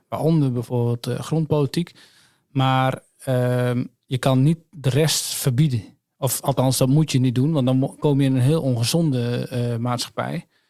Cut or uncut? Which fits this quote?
uncut